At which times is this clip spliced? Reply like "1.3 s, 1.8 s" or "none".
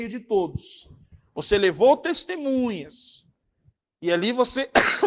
none